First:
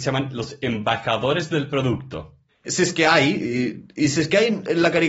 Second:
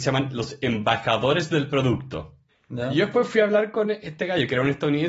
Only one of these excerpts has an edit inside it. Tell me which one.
first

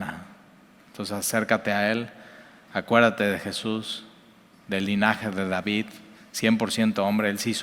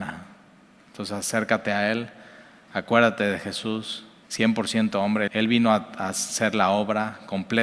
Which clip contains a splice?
second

